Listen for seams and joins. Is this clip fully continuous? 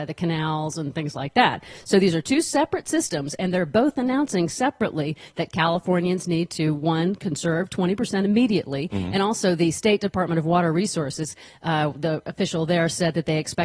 yes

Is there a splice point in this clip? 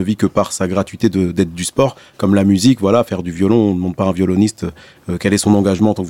no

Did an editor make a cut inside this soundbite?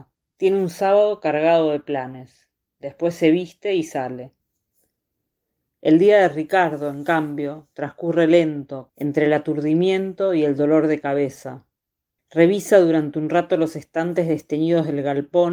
yes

